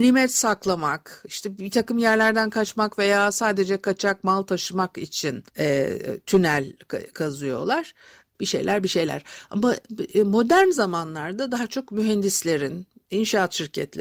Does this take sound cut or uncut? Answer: cut